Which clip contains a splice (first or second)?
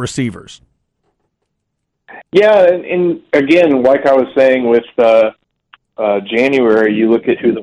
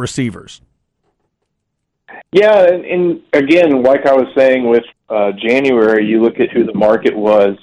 second